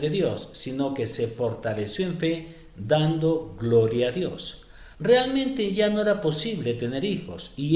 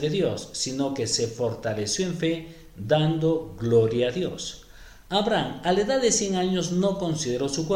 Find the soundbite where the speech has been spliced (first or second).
first